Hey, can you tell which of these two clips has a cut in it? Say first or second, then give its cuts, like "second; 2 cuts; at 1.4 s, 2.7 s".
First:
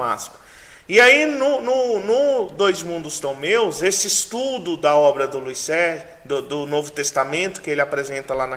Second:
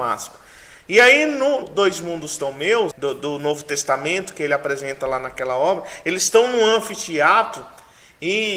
second; 2 cuts; at 1.6 s, 2.9 s